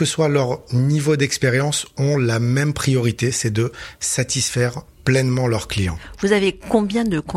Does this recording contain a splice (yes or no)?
no